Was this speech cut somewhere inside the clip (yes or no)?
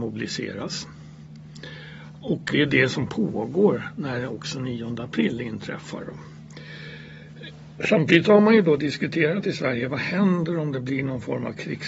yes